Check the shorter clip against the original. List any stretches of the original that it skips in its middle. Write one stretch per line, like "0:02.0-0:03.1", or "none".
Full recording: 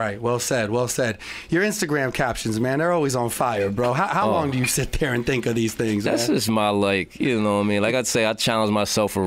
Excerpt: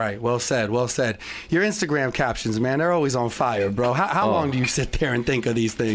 none